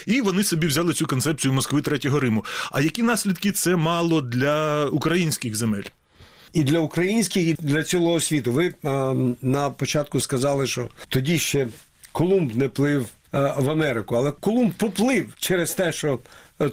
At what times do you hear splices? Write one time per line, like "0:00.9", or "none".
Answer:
0:07.5